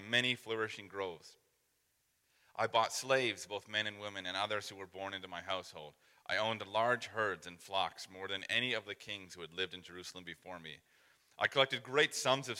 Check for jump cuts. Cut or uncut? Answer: uncut